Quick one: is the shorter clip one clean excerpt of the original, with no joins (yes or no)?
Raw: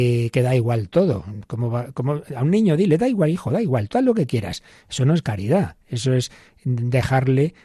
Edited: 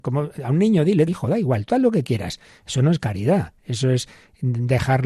no